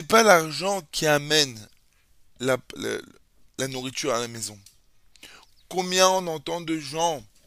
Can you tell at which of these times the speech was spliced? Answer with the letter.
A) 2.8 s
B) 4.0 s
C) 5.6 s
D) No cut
A